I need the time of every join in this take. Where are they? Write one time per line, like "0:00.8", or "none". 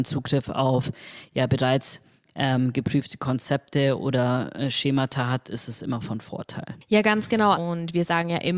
0:07.5